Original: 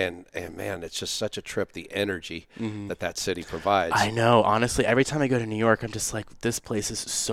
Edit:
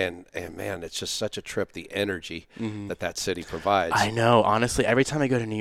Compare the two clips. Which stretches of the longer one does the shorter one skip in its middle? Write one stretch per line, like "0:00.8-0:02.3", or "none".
none